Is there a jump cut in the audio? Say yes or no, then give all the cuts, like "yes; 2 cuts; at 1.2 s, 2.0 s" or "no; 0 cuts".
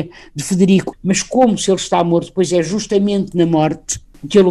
yes; 1 cut; at 0.9 s